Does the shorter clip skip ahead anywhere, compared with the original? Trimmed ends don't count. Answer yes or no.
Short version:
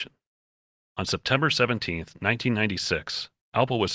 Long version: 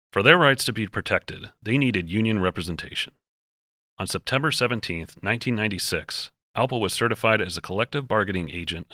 no